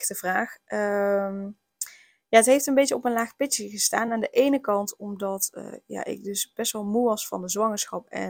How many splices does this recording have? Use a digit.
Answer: 0